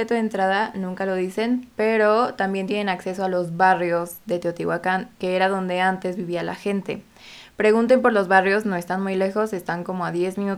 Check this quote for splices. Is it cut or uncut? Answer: uncut